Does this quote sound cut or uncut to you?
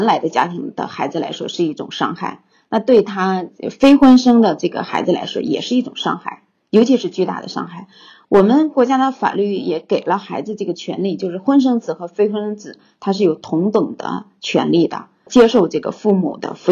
uncut